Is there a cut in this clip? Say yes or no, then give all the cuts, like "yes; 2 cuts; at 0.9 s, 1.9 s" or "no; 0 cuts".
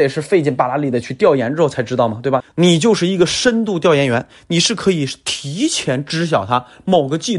yes; 1 cut; at 2.4 s